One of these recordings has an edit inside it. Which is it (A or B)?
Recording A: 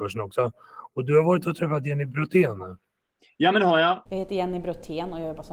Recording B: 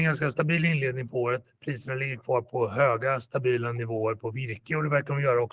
A